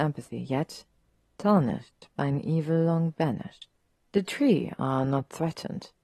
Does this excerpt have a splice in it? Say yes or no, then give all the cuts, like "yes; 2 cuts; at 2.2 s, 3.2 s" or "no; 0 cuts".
yes; 1 cut; at 3.9 s